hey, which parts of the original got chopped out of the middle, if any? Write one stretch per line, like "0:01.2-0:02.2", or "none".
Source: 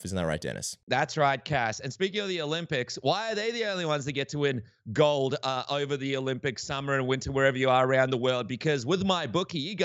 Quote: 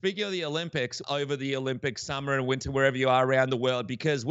0:03.0-0:05.6